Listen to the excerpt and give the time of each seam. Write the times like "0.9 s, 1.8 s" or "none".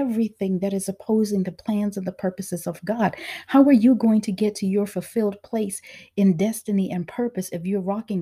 none